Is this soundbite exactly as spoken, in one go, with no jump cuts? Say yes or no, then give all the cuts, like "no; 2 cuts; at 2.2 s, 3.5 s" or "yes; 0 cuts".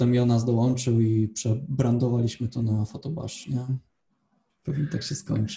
no; 1 cut; at 4.5 s